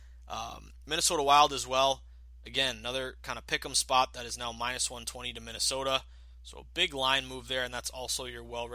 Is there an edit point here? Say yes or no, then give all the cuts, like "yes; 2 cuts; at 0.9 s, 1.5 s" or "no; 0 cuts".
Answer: no; 0 cuts